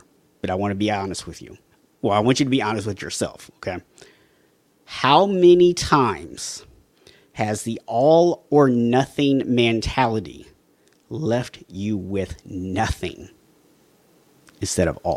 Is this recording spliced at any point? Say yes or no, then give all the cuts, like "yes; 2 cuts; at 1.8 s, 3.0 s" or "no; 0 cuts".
no; 0 cuts